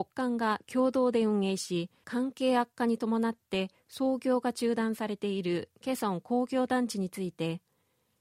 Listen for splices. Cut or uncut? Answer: cut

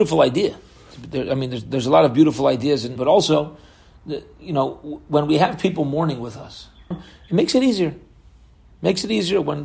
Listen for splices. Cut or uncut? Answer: cut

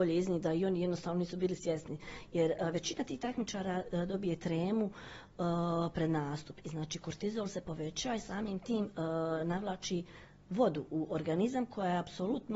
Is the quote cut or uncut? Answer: uncut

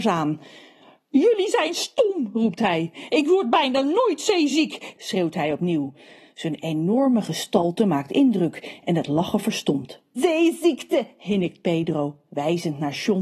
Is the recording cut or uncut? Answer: cut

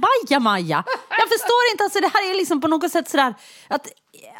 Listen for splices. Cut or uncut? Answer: uncut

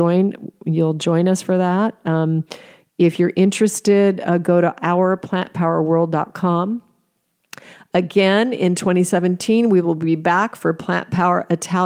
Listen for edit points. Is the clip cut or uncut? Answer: uncut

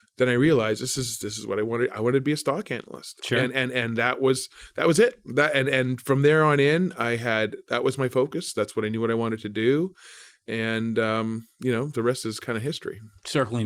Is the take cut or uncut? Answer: uncut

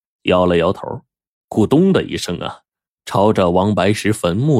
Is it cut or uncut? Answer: uncut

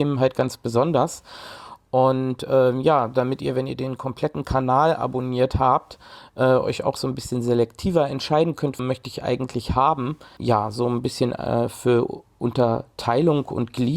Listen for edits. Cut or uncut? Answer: cut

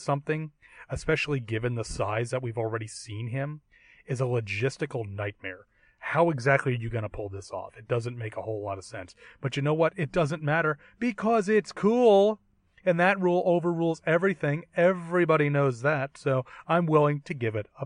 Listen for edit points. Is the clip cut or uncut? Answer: uncut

